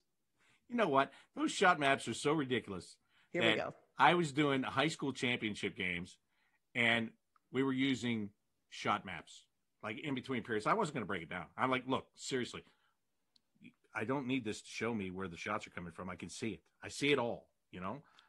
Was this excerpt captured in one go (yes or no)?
yes